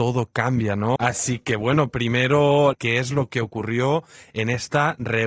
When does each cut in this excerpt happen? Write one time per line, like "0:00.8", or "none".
0:01.0
0:02.7